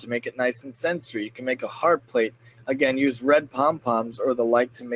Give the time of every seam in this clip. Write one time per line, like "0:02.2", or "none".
none